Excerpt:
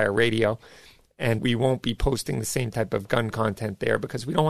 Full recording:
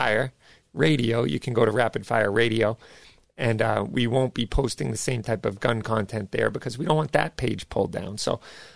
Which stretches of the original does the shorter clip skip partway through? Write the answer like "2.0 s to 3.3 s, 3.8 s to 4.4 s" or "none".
3.6 s to 3.9 s

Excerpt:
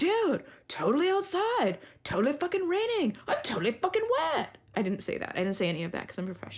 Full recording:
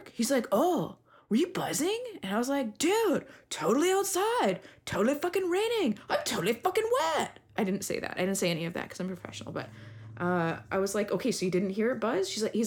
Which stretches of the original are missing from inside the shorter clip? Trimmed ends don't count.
none

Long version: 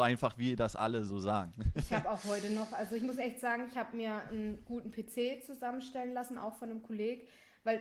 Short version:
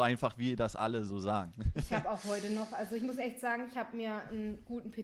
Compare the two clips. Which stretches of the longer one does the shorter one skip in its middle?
none

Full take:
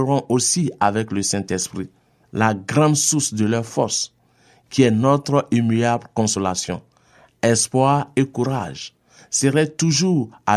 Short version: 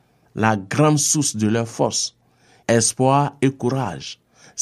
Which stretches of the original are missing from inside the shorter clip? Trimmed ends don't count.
4.6 s to 7.4 s

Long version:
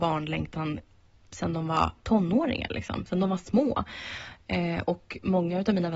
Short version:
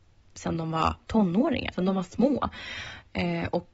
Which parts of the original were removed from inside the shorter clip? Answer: 2.7 s to 3.1 s

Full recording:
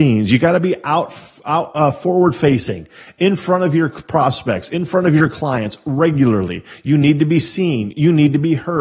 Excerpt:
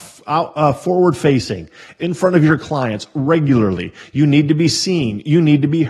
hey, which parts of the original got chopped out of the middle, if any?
3.2 s to 4.7 s

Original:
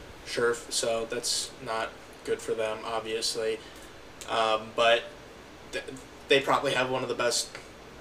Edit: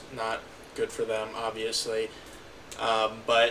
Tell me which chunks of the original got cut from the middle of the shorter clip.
none

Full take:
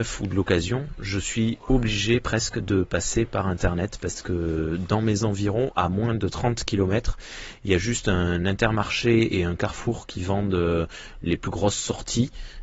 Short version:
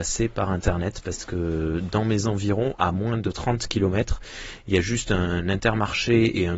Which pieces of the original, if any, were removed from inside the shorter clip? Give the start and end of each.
none

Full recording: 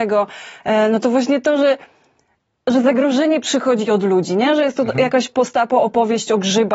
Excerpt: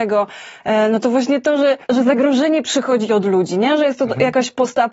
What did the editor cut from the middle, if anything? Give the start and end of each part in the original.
1.8 s to 2.6 s

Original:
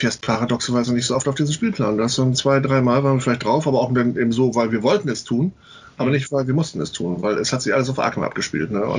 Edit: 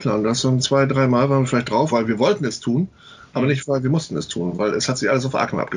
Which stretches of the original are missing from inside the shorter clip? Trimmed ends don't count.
3.6 s to 4.5 s

